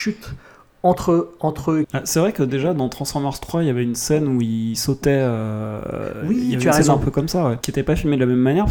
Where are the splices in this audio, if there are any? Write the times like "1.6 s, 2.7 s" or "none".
1.8 s, 7.6 s